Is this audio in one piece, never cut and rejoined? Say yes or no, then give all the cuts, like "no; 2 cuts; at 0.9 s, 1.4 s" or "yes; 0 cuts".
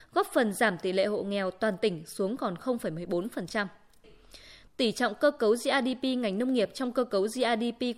no; 1 cut; at 4.0 s